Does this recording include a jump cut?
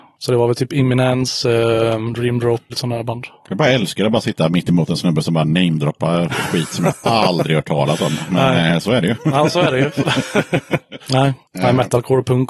yes; 2 cuts; at 2.7 s, 11.0 s

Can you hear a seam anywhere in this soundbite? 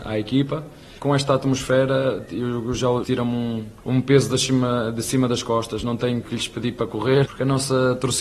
yes; 3 cuts; at 3.0 s, 6.2 s, 7.3 s

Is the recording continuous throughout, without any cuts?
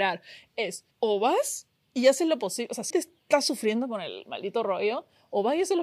no; 2 cuts; at 0.9 s, 2.9 s

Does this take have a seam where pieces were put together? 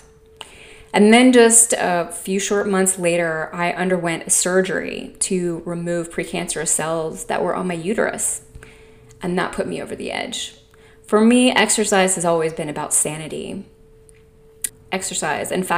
yes; 1 cut; at 14.7 s

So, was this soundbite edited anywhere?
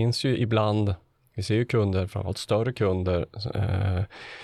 no; 0 cuts

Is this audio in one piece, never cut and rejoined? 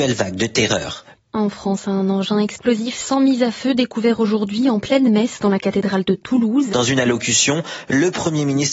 no; 2 cuts; at 1.1 s, 6.7 s

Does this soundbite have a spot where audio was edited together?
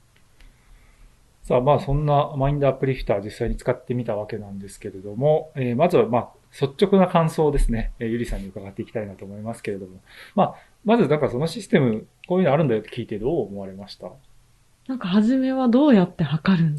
no; 0 cuts

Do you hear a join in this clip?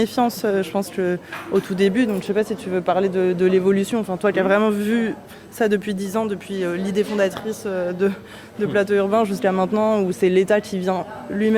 no; 0 cuts

